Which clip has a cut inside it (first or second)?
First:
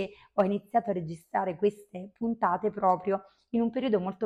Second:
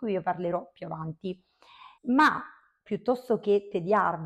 second